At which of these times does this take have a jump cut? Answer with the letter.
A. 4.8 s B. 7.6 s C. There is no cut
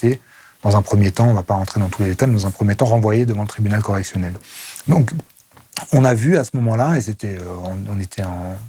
C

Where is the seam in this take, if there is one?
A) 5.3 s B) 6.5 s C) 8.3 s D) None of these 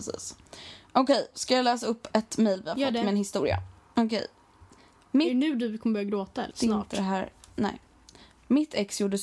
B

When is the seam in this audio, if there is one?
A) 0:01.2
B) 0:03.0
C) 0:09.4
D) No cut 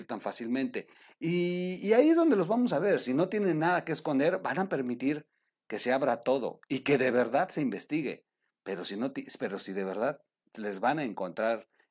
D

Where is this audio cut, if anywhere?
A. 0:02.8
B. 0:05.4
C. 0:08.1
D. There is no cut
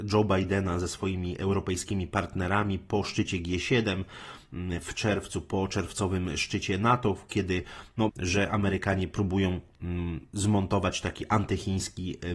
C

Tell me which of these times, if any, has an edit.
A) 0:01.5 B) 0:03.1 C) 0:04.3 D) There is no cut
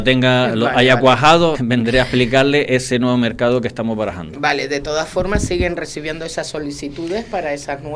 A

